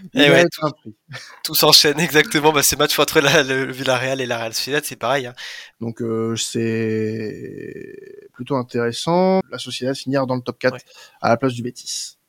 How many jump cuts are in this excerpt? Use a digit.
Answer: 2